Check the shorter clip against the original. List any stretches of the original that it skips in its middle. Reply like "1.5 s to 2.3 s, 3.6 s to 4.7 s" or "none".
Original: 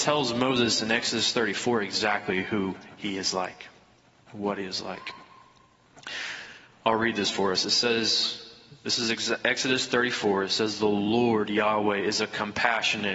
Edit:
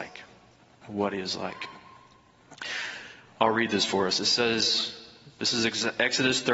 none